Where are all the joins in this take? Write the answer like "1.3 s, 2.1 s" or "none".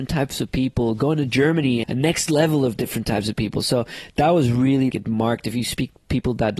1.8 s, 4.9 s